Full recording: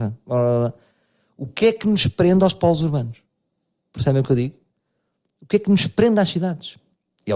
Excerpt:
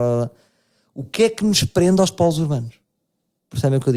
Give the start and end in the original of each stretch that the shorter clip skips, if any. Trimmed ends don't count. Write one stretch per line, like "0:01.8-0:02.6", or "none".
none